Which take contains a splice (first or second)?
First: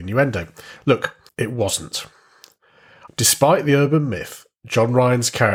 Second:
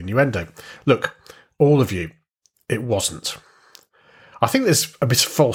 first